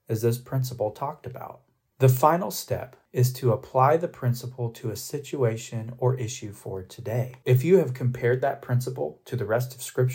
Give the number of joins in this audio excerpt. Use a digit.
1